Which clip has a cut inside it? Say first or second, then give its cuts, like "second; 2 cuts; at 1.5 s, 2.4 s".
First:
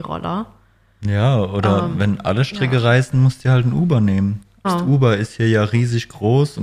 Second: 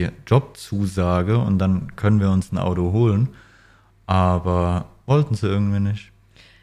first; 1 cut; at 4.6 s